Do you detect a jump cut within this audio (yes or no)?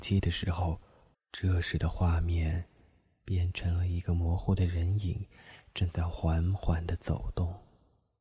yes